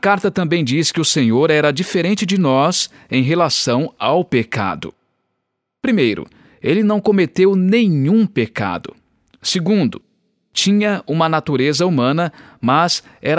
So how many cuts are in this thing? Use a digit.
0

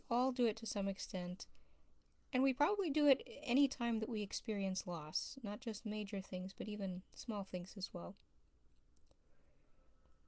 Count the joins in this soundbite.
0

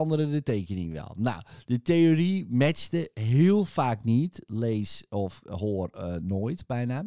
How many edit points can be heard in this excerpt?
0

